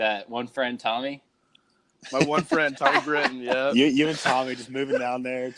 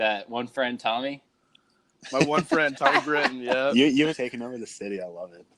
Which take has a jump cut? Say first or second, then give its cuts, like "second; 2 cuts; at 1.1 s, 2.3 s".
second; 1 cut; at 4.1 s